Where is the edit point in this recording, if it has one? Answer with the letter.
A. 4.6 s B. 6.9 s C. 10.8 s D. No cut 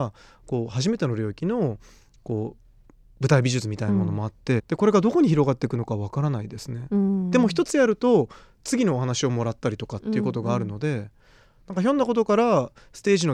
A